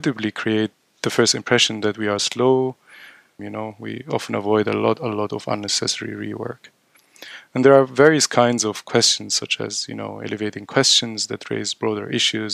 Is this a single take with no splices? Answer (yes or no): no